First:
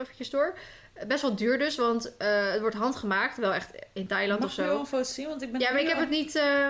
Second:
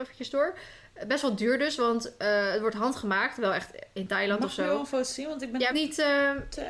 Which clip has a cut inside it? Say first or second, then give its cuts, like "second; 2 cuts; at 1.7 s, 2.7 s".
second; 1 cut; at 5.7 s